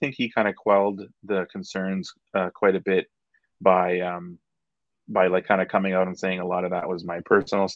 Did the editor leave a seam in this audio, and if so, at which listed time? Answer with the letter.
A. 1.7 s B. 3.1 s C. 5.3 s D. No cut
D